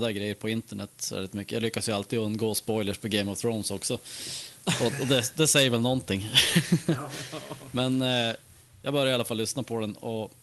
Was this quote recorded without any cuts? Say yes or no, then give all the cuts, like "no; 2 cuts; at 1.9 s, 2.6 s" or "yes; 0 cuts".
yes; 0 cuts